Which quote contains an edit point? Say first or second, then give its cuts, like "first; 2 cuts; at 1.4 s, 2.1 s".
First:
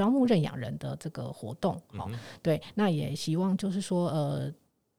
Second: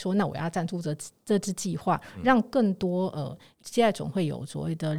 second; 1 cut; at 3.6 s